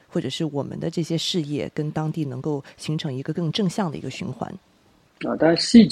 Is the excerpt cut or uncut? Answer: uncut